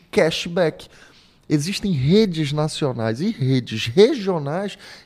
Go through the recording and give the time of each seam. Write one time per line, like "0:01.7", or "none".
none